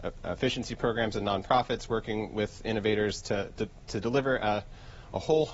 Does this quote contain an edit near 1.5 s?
no; 1 cut; at 3.6 s

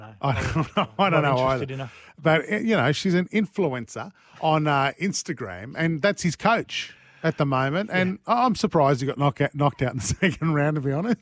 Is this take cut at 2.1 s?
no; 0 cuts

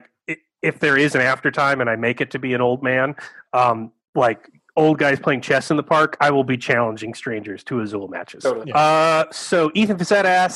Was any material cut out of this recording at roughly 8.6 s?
yes; 1 cut; at 8.6 s

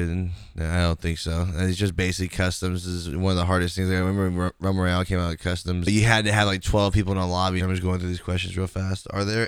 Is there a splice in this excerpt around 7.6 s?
yes; 2 cuts; at 5.9 s, 7.6 s

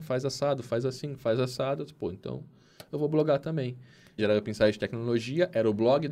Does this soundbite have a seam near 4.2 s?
yes; 1 cut; at 4.2 s

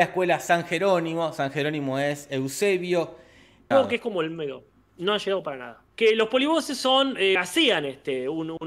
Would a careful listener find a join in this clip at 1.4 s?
no; 3 cuts; at 3.7 s, 5.9 s, 7.4 s

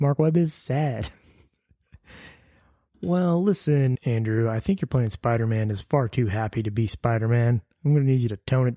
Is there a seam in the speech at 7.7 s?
no; 1 cut; at 3.9 s

